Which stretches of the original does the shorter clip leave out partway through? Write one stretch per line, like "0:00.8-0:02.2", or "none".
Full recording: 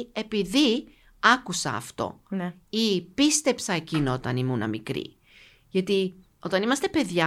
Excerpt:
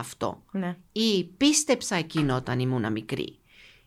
none